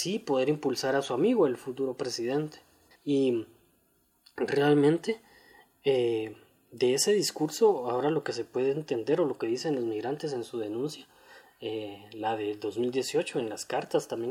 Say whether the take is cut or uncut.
cut